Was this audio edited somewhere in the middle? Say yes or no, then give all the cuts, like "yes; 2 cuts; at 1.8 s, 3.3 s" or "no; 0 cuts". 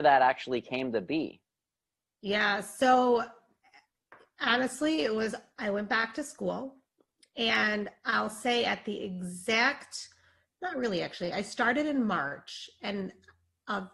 no; 0 cuts